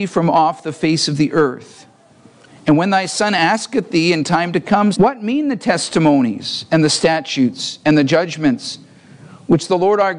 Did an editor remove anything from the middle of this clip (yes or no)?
yes